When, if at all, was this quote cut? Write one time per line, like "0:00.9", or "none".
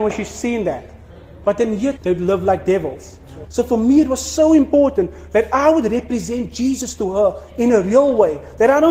0:02.0
0:03.4